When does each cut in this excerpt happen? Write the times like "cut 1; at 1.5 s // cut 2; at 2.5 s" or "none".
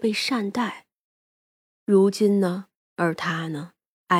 cut 1; at 2.8 s